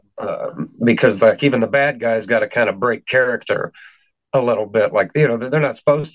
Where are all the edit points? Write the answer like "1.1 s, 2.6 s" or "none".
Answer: none

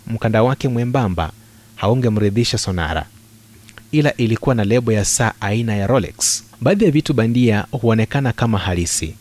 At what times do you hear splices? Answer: 6.5 s

